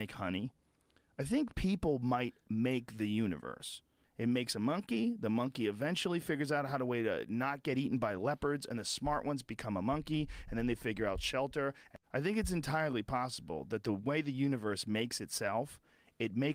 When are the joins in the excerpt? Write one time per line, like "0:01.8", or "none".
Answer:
0:04.0
0:12.0

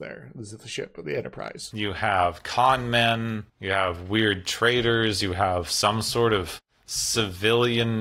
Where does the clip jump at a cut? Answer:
0:01.7
0:03.5

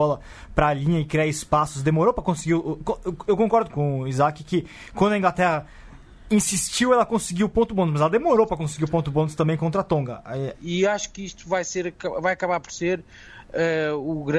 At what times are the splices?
0:03.7
0:10.5

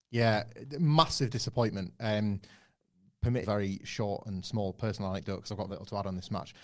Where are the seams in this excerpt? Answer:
0:03.4
0:05.7

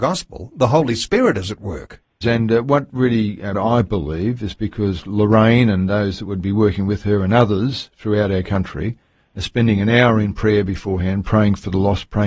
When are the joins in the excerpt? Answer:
0:02.2
0:03.5

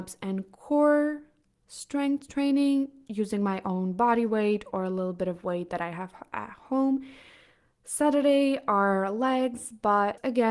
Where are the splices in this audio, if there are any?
none

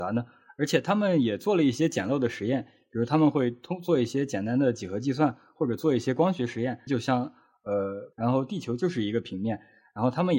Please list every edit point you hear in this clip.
0:06.9
0:08.1

